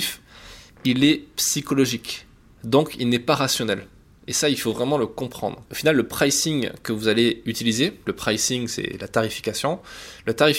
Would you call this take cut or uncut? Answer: cut